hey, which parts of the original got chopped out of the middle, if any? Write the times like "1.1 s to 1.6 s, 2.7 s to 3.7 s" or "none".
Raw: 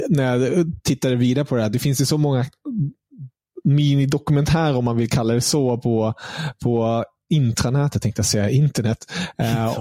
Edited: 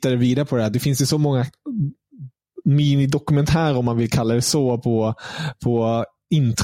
none

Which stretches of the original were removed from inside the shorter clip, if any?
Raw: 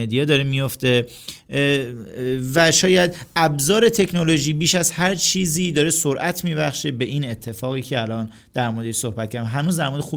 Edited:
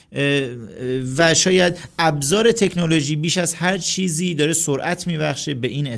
none

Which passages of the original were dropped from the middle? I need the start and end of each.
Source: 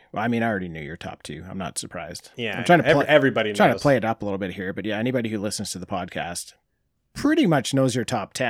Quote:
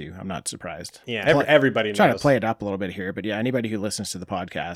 2.6 s to 2.9 s

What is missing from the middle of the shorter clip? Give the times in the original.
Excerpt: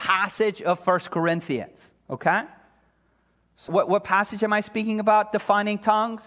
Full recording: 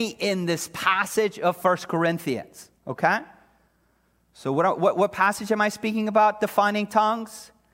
4.5 s to 4.8 s

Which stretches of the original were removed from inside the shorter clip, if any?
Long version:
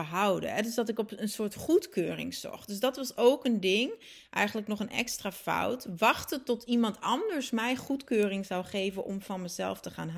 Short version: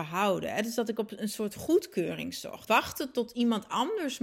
2.7 s to 6.0 s

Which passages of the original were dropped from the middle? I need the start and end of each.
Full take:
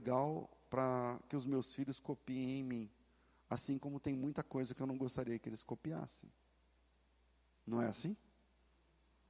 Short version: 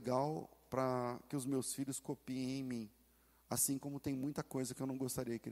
none

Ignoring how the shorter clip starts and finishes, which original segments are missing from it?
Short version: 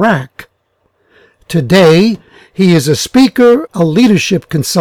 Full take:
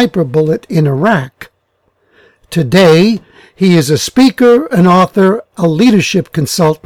4.7 s to 5.5 s

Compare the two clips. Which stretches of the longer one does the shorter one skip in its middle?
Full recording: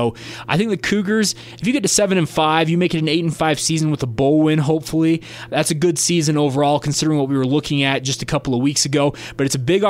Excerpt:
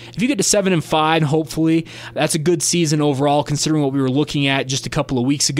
2.7 s to 4.6 s

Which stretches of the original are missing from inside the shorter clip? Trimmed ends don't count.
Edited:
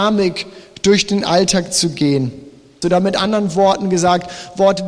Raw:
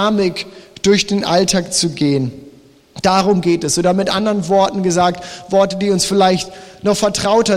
2.8 s to 3.8 s

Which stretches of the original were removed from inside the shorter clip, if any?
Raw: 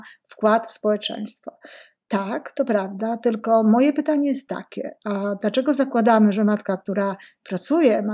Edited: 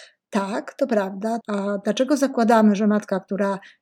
3.2 s to 5.0 s

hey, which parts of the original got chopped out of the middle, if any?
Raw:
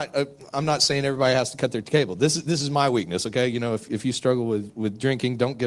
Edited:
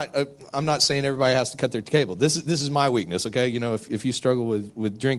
none

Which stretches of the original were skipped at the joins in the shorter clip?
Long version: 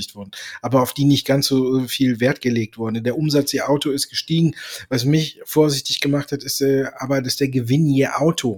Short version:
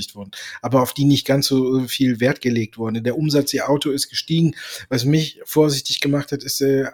none

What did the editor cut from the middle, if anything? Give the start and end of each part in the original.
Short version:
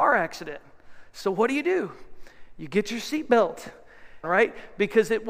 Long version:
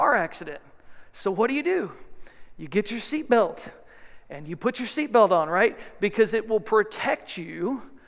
4.2 s to 5.5 s

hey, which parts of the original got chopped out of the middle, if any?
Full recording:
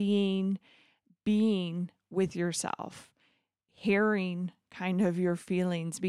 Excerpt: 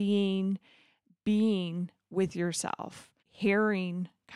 3.2 s to 3.6 s

